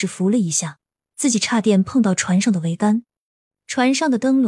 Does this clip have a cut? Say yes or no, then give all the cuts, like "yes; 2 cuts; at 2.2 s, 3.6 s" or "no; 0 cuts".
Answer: yes; 1 cut; at 3.5 s